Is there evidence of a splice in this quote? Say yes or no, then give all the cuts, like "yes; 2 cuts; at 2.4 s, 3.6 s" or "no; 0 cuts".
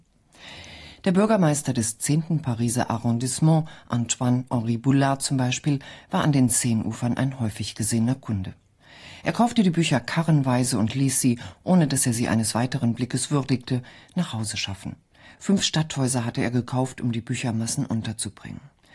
no; 0 cuts